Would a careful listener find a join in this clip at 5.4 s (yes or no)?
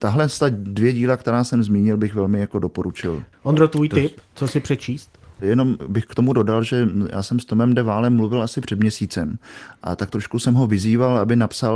yes